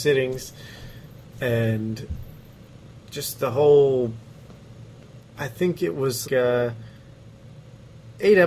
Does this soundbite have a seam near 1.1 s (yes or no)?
no